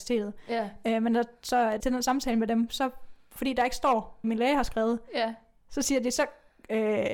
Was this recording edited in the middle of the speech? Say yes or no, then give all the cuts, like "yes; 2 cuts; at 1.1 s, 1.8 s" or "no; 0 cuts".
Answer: yes; 2 cuts; at 1.8 s, 4.2 s